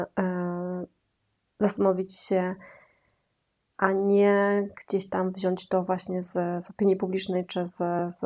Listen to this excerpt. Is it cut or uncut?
cut